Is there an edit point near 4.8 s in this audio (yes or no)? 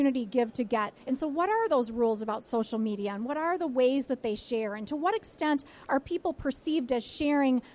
no